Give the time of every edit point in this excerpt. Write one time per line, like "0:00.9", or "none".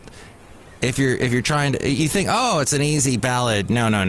none